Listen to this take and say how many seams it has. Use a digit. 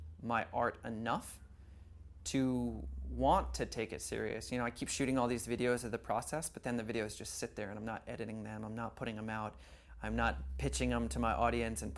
0